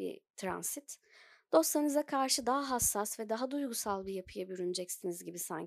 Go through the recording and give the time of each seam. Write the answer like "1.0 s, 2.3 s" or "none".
none